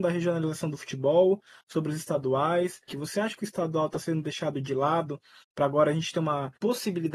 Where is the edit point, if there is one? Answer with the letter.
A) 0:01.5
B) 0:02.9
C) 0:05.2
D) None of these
B